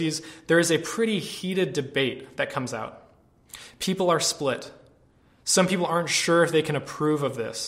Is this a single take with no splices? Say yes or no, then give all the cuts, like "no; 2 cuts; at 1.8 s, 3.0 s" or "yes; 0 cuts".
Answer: yes; 0 cuts